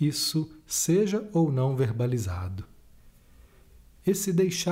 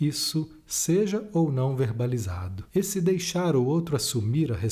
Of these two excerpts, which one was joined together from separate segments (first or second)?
second